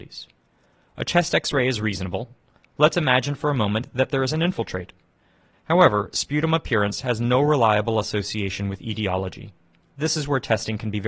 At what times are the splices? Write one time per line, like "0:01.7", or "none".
0:05.5
0:09.8